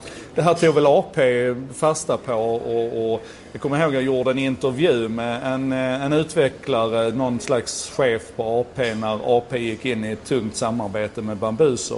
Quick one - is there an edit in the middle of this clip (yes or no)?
no